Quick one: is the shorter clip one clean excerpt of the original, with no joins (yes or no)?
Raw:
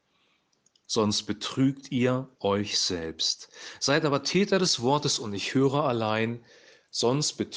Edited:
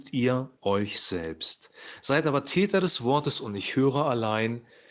yes